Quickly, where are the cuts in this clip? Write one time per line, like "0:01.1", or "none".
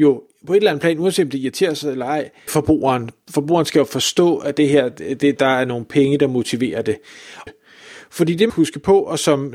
0:02.5
0:07.5
0:08.5